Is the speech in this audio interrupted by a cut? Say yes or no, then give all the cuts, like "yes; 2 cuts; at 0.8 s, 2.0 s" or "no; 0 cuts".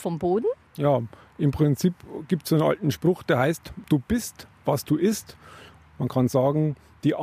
no; 0 cuts